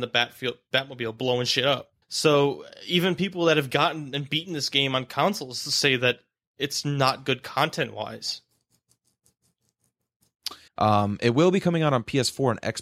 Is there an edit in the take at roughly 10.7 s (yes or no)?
yes